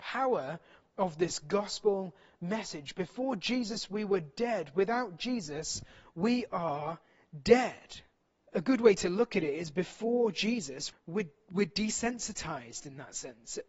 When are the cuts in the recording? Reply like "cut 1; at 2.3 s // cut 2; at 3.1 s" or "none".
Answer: cut 1; at 8.4 s // cut 2; at 10.9 s